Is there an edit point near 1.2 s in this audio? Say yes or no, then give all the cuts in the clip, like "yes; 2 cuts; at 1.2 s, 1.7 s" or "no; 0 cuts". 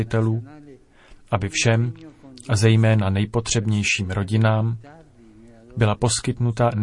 no; 0 cuts